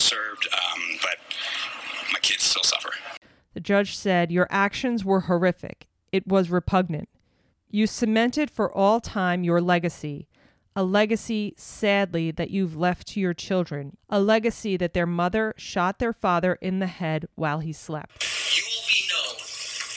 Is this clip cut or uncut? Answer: cut